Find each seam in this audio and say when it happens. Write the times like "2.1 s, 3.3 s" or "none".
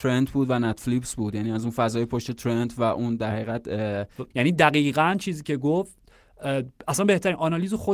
4.3 s